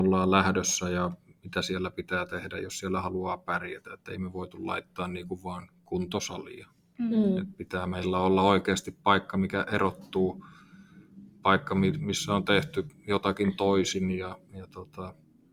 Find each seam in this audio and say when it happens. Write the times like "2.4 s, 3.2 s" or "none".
none